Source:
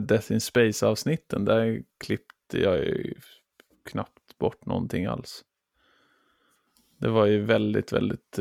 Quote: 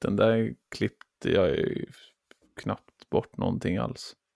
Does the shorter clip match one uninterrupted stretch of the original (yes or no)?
yes